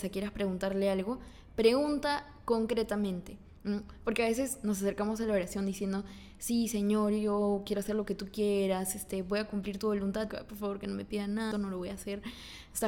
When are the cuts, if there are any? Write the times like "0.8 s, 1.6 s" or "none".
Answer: 10.3 s, 11.5 s